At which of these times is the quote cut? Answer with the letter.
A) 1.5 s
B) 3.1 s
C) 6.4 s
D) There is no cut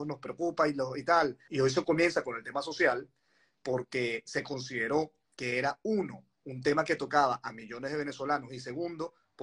A